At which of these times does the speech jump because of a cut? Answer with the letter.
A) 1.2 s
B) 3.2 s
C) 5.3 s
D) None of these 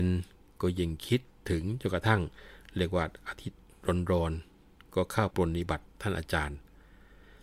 C